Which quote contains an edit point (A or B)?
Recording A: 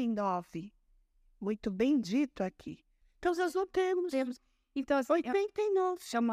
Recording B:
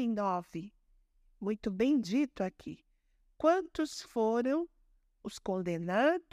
A